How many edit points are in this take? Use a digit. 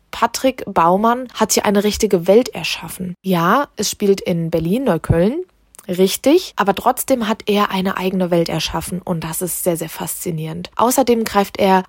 0